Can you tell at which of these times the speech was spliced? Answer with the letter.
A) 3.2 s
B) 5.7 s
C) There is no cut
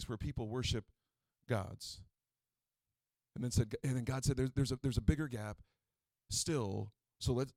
A